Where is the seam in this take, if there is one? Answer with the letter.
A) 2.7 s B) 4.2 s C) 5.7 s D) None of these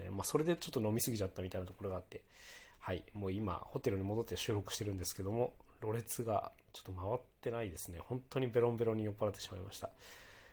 D